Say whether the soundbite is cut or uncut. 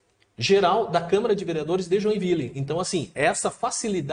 uncut